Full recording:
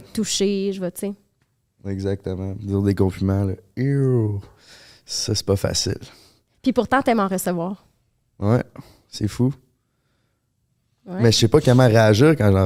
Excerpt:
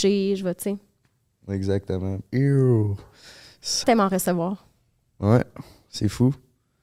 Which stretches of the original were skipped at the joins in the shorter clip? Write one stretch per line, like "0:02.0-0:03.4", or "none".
0:02.6-0:03.7
0:05.3-0:07.0